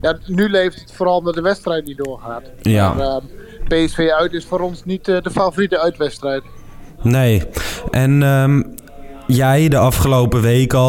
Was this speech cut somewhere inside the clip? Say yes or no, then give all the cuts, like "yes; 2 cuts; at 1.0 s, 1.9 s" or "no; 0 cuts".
no; 0 cuts